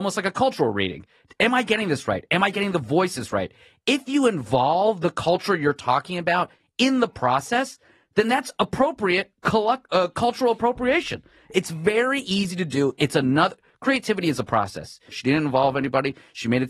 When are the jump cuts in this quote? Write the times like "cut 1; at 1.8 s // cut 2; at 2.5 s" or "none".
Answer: cut 1; at 15.1 s